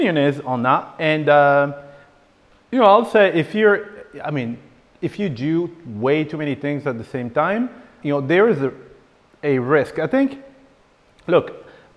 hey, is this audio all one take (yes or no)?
no